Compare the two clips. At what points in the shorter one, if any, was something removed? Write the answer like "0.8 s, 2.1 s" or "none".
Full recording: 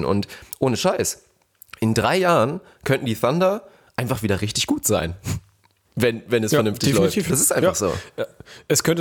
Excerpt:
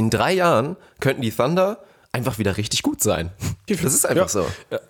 3.7 s